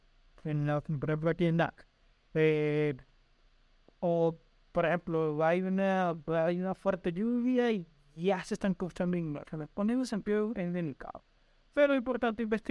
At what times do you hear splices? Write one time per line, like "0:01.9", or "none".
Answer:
none